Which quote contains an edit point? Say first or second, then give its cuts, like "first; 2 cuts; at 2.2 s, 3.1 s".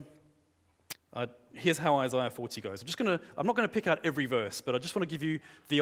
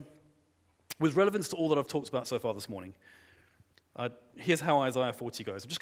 first; 1 cut; at 0.9 s